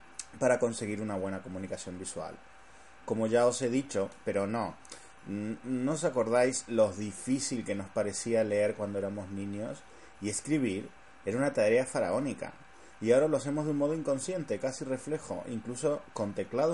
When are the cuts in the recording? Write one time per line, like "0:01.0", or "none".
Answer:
0:04.2